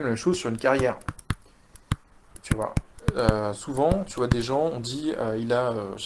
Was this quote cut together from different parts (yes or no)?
no